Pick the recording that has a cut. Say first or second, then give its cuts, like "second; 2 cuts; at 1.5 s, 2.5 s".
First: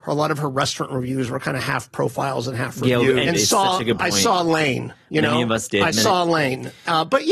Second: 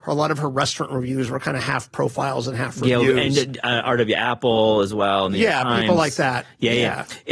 first; 1 cut; at 3.3 s